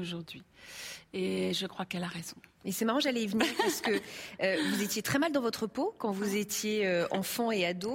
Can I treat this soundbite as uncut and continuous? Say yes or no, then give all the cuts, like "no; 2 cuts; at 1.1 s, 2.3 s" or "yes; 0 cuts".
yes; 0 cuts